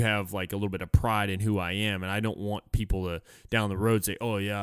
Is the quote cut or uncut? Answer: uncut